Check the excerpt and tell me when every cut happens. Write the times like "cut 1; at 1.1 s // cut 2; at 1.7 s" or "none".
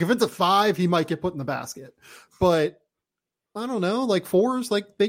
none